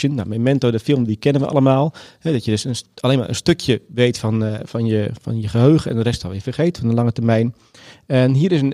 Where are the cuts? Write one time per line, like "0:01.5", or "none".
none